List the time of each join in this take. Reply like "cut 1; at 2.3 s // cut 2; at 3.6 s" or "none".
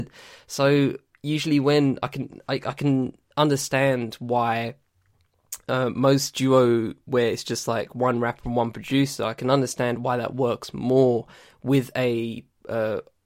none